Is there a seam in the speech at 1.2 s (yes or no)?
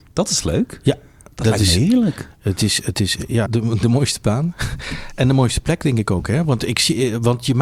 no